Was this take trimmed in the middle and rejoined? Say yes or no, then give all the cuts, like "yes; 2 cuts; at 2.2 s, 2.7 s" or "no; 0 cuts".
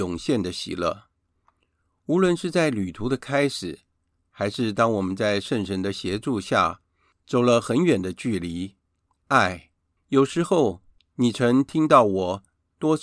yes; 1 cut; at 10.0 s